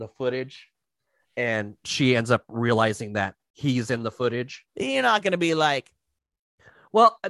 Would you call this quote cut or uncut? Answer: cut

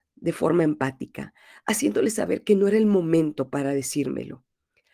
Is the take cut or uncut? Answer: uncut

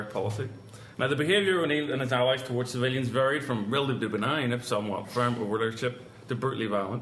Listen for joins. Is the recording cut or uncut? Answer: cut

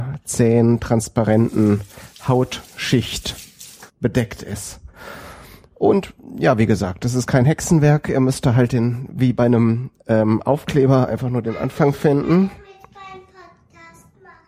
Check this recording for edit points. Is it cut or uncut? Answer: cut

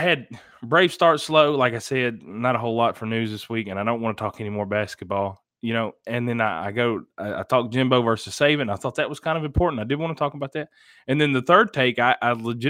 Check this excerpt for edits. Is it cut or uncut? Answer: uncut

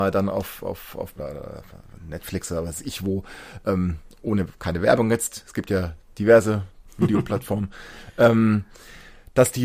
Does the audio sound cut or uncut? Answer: cut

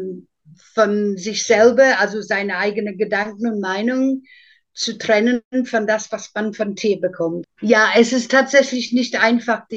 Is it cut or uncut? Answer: cut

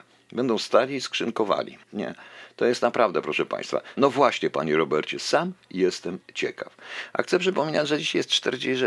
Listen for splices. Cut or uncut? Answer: cut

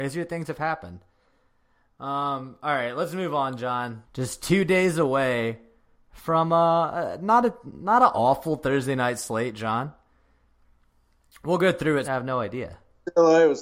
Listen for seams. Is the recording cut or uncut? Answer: cut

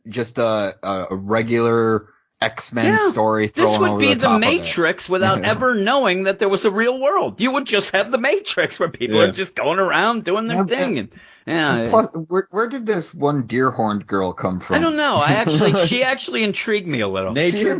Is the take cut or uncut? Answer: uncut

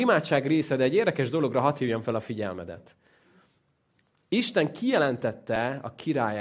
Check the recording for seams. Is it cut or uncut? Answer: uncut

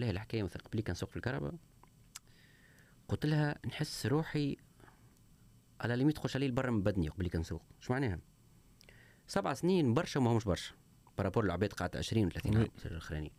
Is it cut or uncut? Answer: uncut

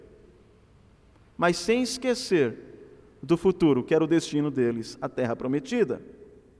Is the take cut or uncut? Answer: uncut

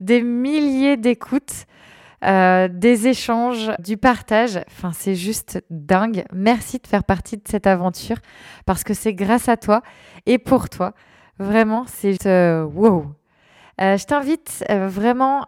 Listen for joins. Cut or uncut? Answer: cut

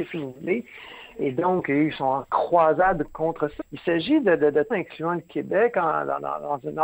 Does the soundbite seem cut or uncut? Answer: cut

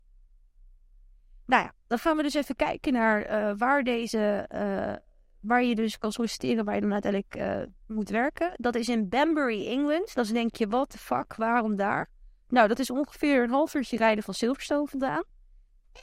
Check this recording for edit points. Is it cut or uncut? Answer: uncut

